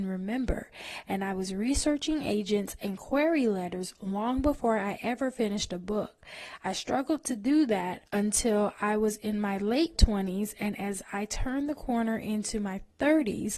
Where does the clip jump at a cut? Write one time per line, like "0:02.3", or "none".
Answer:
0:08.1